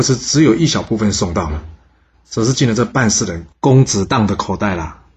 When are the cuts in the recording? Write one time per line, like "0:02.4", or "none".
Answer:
0:02.1